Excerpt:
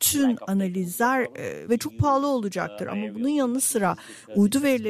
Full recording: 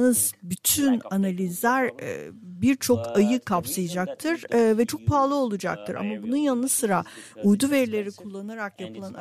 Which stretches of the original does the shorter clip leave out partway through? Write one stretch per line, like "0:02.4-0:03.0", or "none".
0:02.3-0:04.8

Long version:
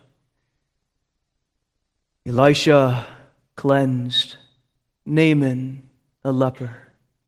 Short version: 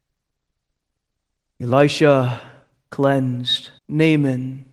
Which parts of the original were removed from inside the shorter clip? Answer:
0:04.4-0:05.0

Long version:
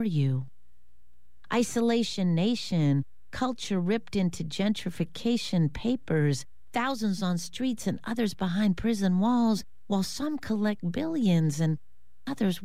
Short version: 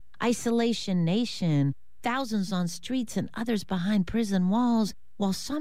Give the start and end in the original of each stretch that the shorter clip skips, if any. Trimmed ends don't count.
0:03.3-0:06.7

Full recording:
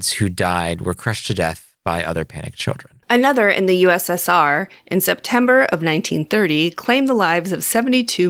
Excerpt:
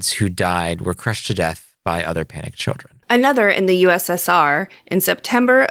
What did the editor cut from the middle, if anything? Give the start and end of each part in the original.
none

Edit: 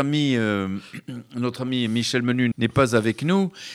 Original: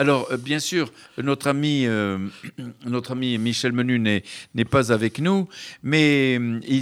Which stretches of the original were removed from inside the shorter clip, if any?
0:04.0-0:04.5

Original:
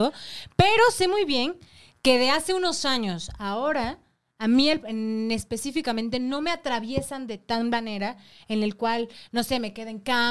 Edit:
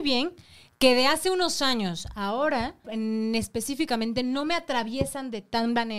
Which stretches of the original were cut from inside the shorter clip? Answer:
0:04.1-0:04.8

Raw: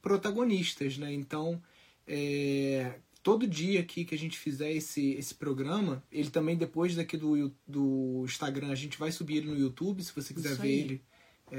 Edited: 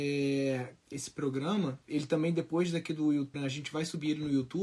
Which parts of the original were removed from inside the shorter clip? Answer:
0:03.2-0:05.2
0:07.6-0:08.6

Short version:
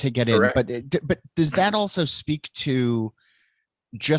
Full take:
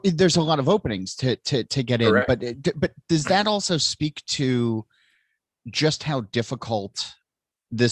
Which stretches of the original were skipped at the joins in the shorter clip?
none

